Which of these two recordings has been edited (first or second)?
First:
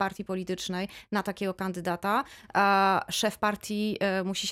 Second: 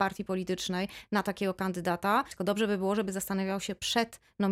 second